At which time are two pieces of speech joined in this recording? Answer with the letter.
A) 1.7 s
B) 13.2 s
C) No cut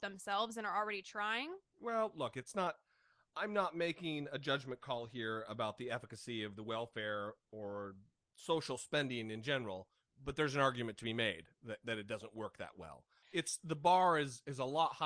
B